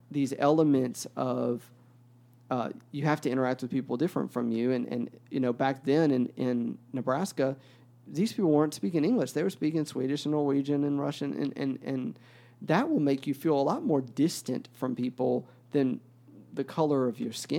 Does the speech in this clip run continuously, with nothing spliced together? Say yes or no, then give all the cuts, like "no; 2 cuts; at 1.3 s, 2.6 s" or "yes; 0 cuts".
yes; 0 cuts